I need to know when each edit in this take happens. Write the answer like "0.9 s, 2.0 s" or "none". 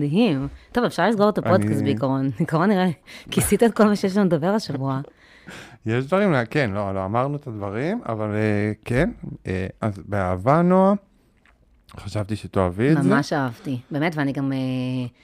none